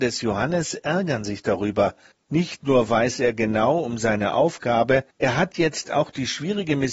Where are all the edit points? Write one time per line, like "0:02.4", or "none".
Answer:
0:02.1
0:05.1